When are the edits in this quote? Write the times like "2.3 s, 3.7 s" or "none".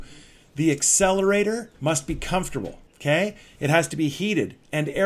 1.7 s, 2.9 s